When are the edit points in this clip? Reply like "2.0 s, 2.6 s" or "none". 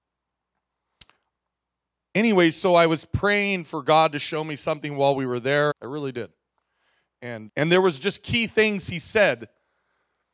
5.7 s, 7.5 s

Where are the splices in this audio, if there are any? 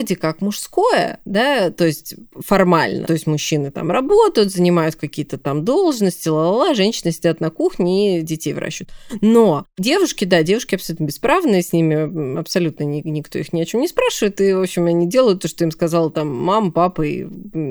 3.0 s

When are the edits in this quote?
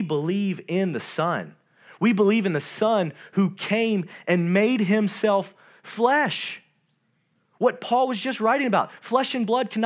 none

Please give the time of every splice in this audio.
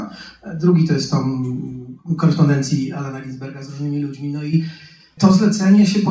none

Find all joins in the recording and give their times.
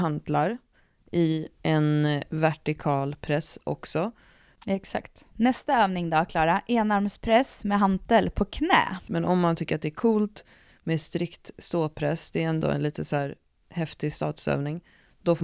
4.6 s, 9.1 s

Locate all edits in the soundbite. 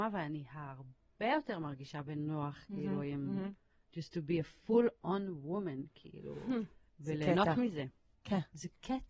8.1 s

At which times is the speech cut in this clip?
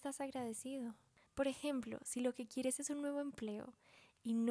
1.3 s

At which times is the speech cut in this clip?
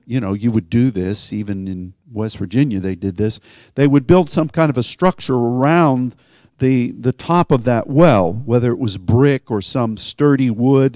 none

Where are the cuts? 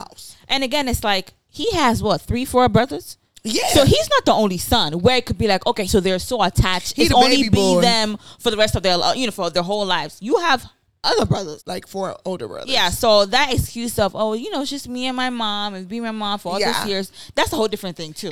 5.9 s, 11.6 s

